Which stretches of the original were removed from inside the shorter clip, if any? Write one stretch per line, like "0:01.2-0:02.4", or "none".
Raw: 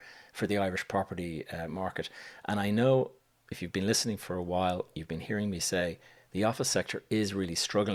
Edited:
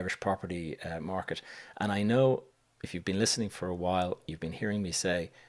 none